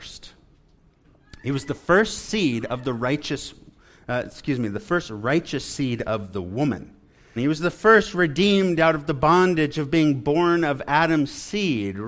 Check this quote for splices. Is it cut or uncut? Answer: cut